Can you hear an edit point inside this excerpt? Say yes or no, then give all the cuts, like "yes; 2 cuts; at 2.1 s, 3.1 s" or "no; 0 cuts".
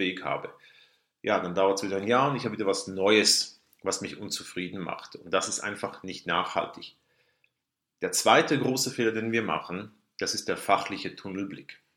no; 0 cuts